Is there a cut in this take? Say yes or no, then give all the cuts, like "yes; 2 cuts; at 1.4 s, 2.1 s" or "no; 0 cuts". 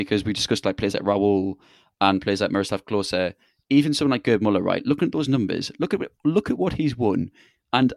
no; 0 cuts